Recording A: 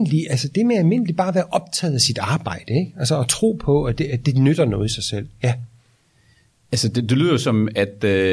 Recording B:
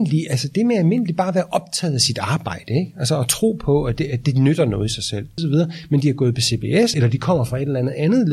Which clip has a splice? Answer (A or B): B